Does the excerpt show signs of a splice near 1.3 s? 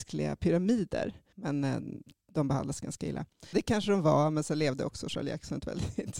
yes; 2 cuts; at 1.3 s, 3.5 s

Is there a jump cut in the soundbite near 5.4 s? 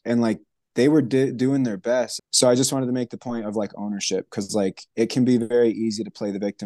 no; 1 cut; at 2.2 s

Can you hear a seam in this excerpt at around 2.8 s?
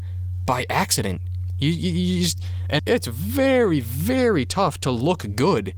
yes; 1 cut; at 2.8 s

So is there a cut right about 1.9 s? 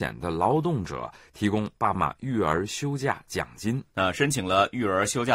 yes; 2 cuts; at 1.9 s, 3.9 s

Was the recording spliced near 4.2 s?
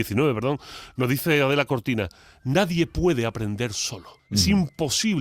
yes; 1 cut; at 4.2 s

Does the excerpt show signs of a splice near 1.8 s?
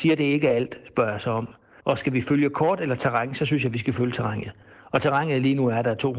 yes; 1 cut; at 1.8 s

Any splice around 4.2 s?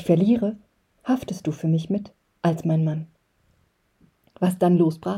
yes; 1 cut; at 4.2 s

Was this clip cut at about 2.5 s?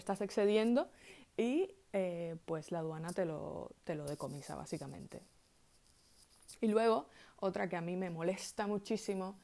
no; 0 cuts

